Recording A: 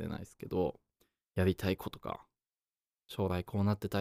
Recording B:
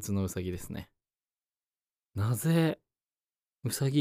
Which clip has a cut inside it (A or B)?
A